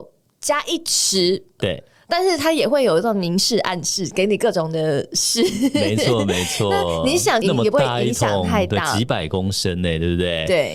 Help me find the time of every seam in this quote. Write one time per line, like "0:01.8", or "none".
0:01.6
0:07.4